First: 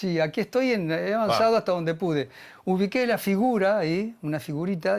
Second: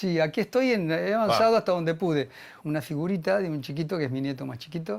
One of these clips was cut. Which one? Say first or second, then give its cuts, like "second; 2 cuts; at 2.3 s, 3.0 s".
second; 1 cut; at 2.6 s